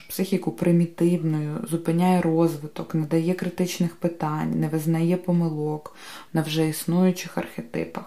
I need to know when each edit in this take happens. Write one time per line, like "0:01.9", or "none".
0:06.3